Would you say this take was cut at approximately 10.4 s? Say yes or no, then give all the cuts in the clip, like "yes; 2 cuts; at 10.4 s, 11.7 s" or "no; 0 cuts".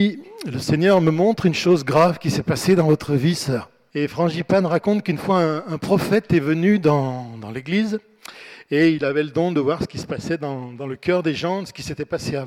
no; 1 cut; at 3.9 s